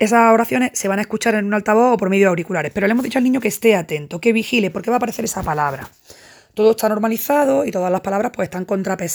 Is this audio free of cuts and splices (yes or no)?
yes